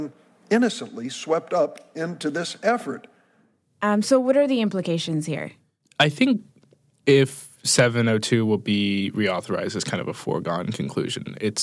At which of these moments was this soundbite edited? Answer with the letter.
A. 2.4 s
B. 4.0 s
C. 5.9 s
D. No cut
B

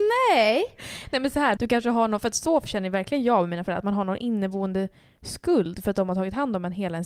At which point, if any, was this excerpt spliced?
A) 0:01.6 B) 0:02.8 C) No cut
A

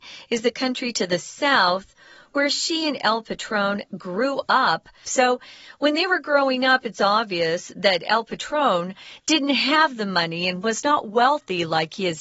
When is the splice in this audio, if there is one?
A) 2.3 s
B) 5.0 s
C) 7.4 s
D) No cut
B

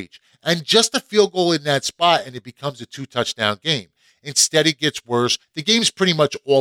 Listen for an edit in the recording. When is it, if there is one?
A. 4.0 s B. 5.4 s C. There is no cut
B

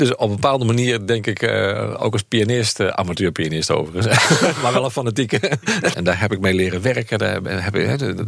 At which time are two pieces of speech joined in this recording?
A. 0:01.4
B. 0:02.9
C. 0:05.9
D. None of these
C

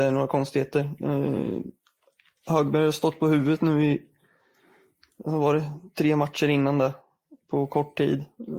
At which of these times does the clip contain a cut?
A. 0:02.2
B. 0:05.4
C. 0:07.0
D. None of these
D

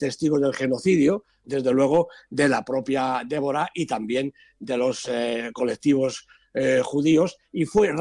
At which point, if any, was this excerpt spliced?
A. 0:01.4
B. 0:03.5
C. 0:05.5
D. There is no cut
A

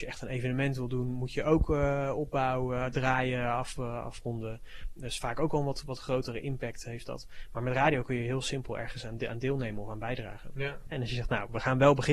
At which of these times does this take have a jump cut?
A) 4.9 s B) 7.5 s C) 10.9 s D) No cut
C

